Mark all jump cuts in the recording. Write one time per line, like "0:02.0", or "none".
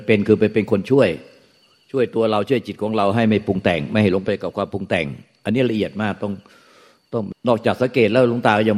0:07.3